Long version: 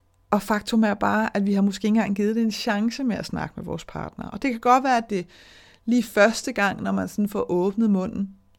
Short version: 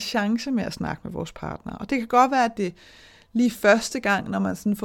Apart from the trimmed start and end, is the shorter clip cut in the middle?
no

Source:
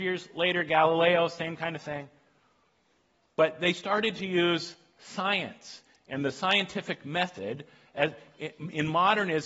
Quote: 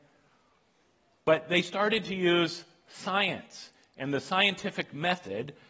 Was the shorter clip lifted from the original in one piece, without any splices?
yes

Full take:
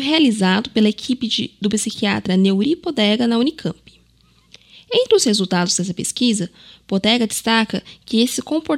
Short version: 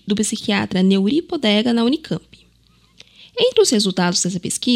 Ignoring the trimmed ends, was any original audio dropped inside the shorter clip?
no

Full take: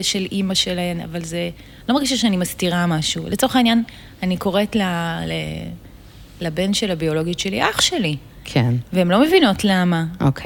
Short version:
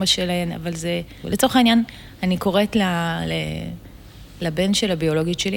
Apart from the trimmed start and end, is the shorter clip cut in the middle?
yes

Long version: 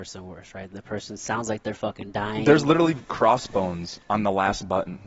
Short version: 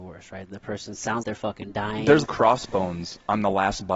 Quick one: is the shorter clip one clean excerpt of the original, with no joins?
no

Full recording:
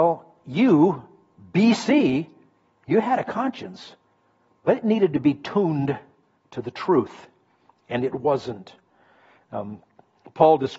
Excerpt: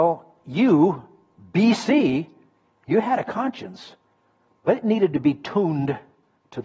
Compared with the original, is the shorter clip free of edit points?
yes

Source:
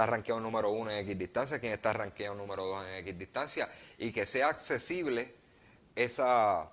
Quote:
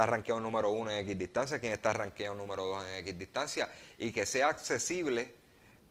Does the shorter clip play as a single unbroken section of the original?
yes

